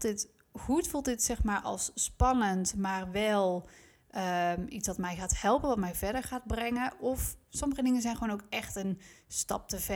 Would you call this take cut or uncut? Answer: uncut